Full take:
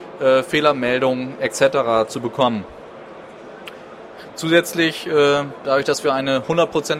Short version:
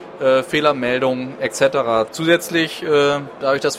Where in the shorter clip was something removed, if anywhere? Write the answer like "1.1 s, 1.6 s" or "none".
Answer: 2.1 s